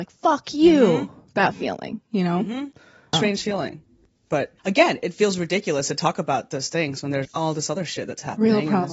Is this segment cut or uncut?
cut